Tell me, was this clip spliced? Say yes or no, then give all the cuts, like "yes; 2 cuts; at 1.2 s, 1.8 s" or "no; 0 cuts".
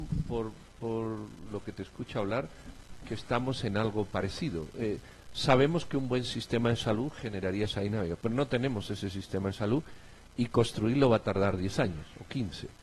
no; 0 cuts